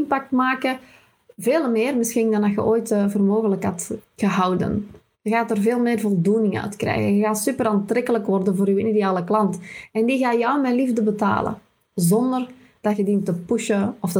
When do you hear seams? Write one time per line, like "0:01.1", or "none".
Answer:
none